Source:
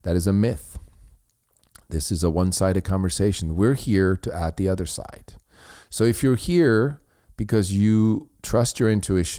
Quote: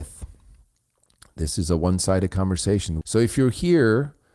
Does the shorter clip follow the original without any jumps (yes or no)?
no